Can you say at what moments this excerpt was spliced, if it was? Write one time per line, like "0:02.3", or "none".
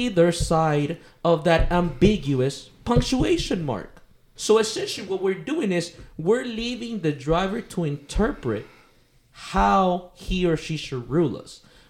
0:04.4